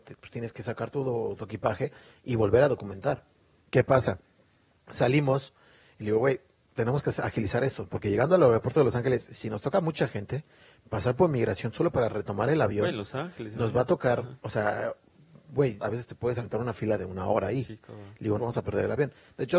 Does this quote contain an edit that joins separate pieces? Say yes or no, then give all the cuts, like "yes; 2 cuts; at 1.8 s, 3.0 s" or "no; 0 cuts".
yes; 2 cuts; at 15.8 s, 18.4 s